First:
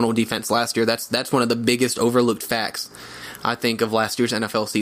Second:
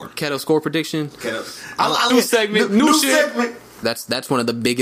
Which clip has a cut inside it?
second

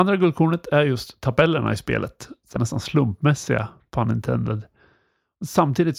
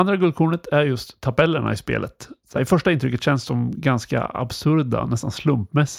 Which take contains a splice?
first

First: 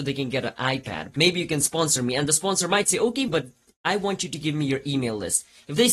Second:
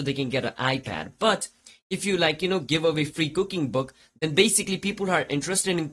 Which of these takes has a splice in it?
first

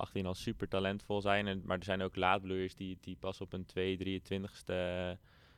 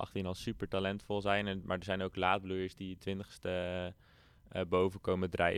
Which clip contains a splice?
second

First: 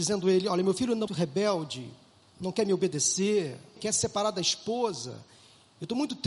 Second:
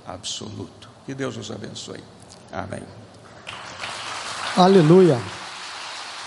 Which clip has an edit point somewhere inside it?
first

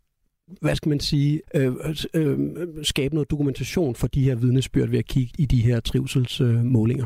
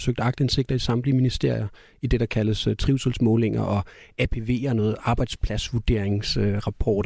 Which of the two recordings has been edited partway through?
first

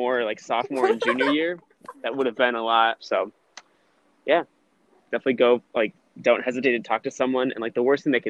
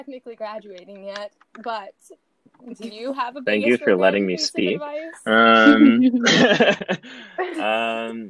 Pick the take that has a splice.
first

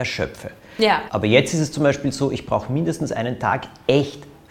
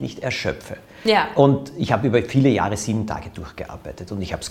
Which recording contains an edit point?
first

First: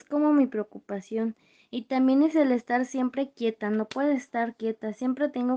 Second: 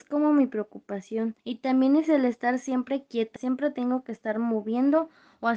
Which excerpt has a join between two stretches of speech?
second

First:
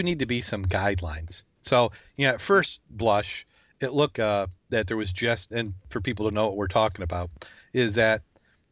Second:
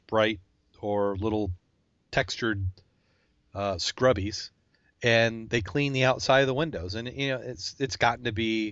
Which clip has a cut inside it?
first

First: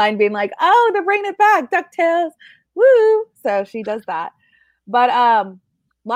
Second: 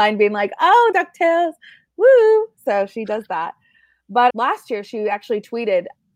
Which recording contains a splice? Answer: second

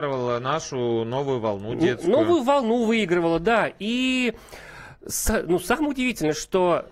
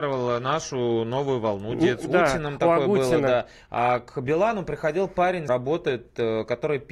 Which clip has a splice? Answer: second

